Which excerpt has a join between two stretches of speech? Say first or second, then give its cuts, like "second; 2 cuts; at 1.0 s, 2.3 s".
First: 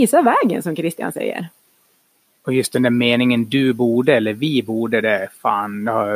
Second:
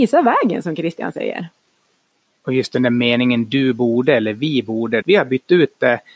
second; 1 cut; at 5.0 s